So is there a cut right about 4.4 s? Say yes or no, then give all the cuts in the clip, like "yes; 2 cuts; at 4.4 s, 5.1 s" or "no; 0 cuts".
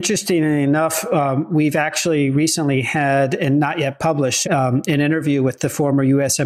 yes; 1 cut; at 4.4 s